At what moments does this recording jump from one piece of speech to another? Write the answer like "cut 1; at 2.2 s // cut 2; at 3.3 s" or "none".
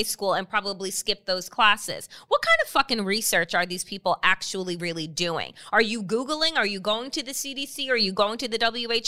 none